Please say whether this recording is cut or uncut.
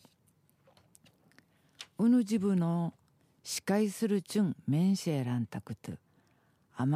uncut